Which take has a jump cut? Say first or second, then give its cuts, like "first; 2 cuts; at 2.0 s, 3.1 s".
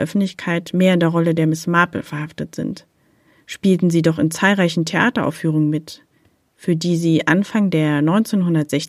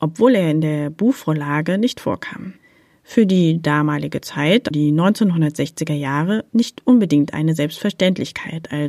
second; 1 cut; at 4.7 s